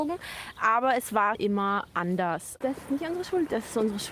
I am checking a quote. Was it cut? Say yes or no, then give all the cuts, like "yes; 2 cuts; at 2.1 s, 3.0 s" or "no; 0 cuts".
yes; 2 cuts; at 1.3 s, 2.6 s